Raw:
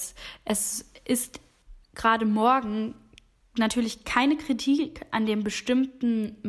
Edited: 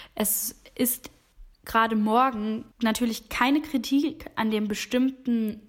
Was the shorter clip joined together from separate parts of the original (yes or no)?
yes